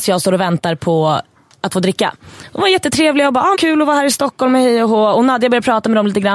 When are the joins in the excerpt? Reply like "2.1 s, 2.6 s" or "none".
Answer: 3.5 s